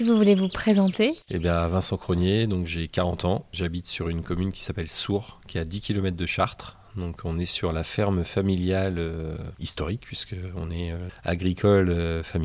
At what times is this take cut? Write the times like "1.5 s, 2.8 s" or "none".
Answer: 9.5 s, 11.1 s